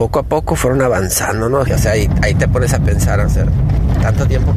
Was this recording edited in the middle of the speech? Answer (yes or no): yes